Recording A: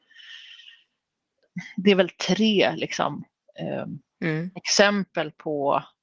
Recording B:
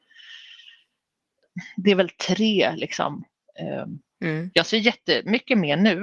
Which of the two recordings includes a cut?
B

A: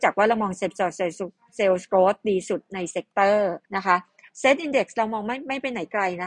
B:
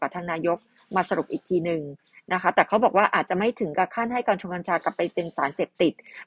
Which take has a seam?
A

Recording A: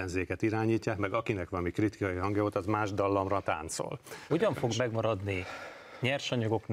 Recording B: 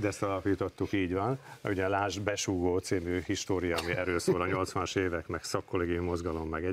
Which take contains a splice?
A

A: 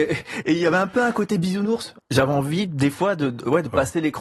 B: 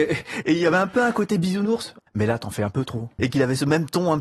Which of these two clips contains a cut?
B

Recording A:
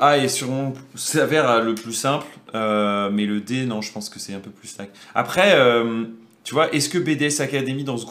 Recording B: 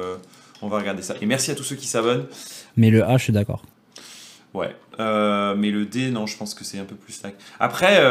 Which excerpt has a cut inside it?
B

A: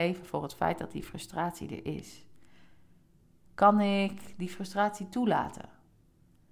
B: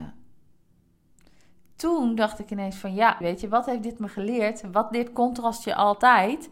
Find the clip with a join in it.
B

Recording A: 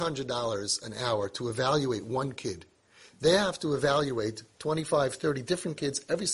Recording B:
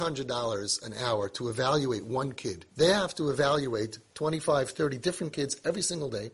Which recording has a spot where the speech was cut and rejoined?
B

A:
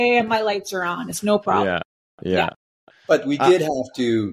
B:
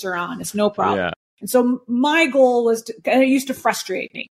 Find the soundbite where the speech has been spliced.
B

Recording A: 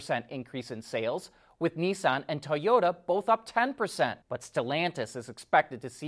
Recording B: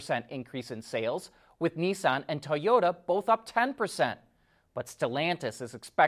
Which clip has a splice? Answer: A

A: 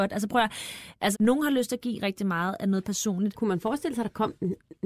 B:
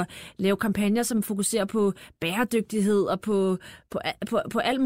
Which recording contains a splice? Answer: A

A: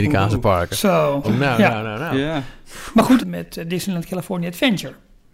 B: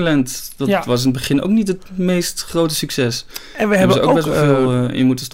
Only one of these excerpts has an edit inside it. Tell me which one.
A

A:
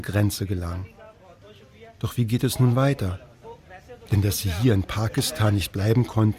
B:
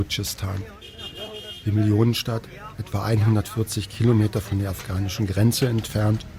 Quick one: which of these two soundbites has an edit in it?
A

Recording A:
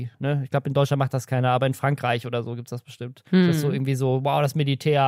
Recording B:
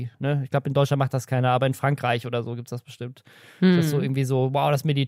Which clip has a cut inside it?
A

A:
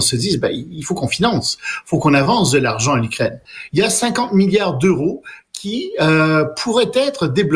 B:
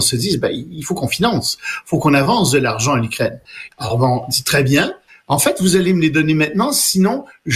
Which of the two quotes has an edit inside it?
B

